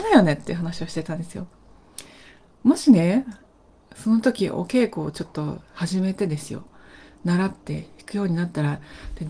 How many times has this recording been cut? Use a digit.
0